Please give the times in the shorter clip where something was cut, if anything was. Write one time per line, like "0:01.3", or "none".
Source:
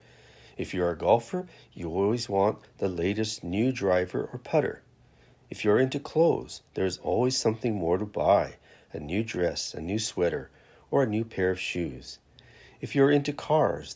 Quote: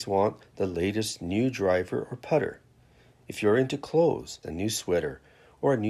0:04.4